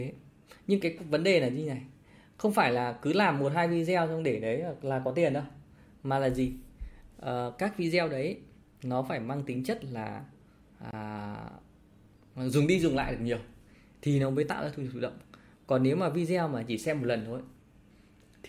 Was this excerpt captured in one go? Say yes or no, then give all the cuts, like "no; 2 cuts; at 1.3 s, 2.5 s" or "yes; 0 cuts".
yes; 0 cuts